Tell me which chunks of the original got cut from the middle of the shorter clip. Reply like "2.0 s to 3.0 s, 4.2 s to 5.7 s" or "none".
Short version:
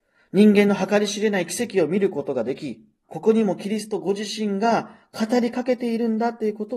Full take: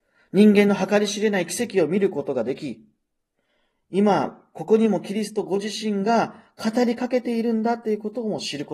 3.0 s to 4.5 s